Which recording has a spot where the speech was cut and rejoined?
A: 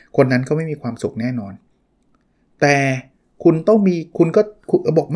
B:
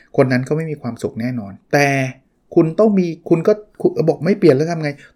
B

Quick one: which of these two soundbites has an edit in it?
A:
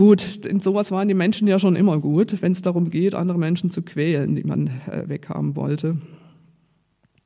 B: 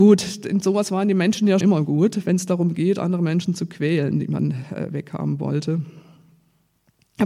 B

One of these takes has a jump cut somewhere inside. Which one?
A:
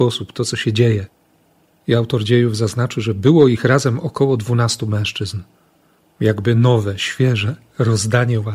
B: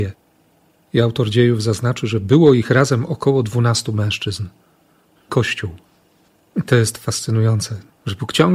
B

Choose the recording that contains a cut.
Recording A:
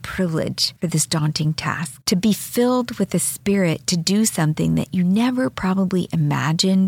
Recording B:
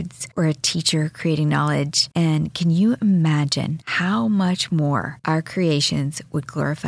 B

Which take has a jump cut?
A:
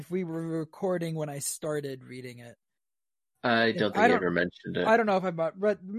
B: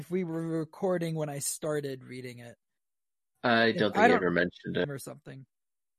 B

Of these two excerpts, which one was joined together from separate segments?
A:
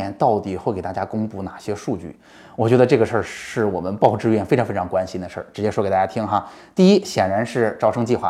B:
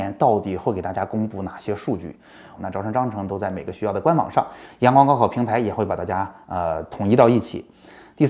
B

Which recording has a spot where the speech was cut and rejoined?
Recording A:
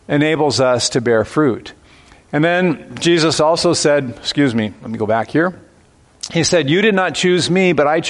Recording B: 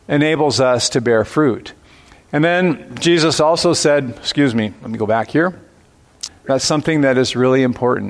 B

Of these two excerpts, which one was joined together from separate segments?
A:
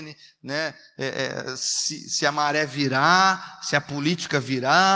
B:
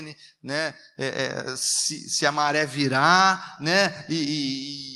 B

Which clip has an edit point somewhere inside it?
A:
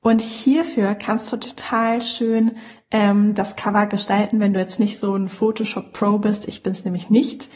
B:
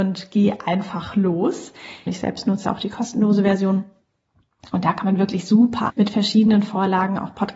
B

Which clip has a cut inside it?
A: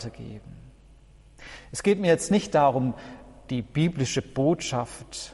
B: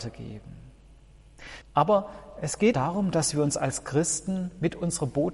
B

